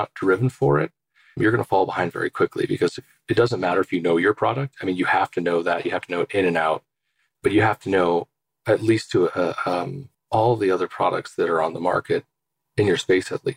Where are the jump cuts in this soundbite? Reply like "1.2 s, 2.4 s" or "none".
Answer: 10.1 s